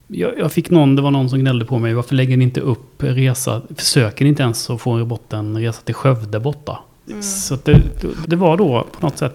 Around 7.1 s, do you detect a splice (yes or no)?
yes